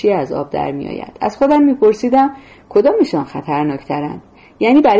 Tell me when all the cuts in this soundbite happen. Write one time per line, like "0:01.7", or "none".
none